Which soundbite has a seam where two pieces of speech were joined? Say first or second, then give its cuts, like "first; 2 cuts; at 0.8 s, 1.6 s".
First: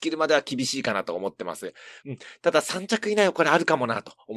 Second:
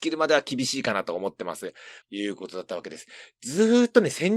second; 1 cut; at 2.0 s